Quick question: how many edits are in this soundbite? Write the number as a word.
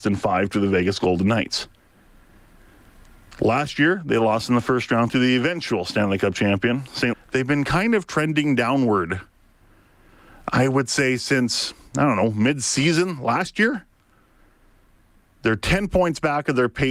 one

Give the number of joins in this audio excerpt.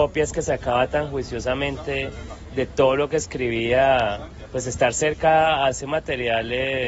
zero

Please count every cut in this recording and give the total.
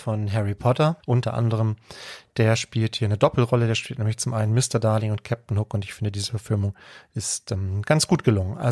zero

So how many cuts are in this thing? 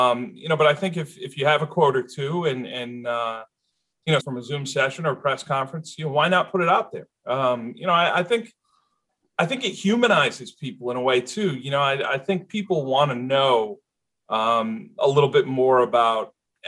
one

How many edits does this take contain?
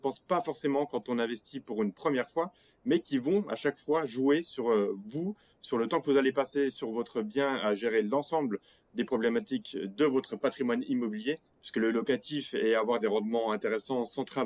one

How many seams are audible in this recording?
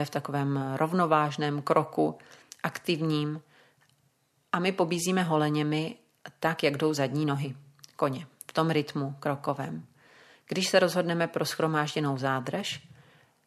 zero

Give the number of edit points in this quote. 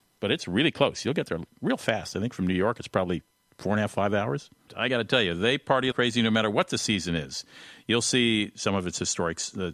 two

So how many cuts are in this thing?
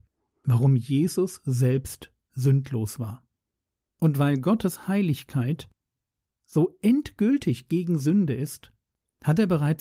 one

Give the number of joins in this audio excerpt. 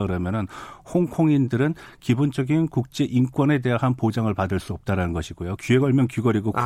one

